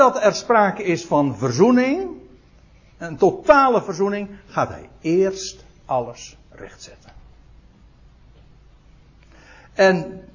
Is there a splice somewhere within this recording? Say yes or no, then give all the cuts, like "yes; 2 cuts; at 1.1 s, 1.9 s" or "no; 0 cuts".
no; 0 cuts